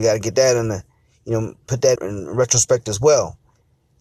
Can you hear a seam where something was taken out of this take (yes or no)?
yes